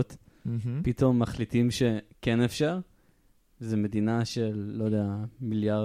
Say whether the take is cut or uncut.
uncut